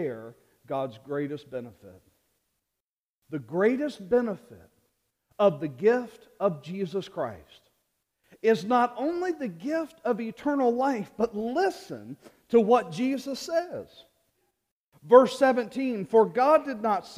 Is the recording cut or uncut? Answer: uncut